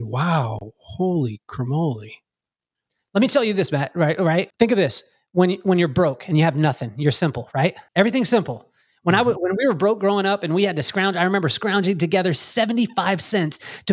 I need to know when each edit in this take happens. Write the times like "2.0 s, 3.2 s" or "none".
4.5 s, 7.9 s